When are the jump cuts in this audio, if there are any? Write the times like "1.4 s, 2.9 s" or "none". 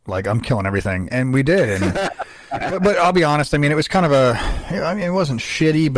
none

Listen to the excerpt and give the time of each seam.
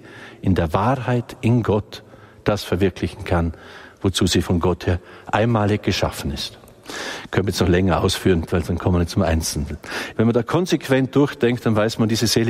8.5 s, 10.1 s

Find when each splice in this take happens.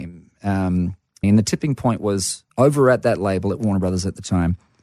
1.2 s, 2.5 s

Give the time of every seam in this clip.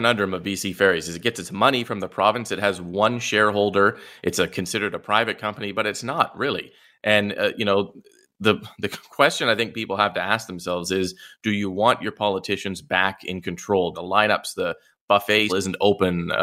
13.9 s, 15.5 s

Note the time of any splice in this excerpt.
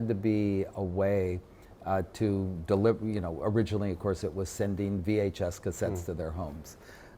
none

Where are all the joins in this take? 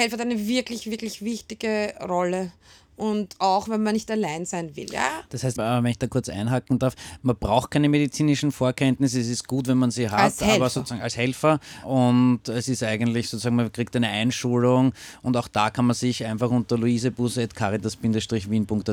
5.6 s

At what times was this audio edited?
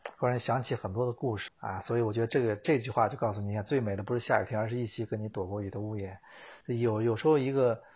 1.5 s, 6.6 s

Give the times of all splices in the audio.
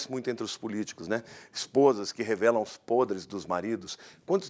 none

